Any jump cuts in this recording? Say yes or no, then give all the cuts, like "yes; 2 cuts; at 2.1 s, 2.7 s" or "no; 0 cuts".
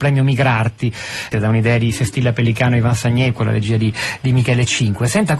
yes; 1 cut; at 1.3 s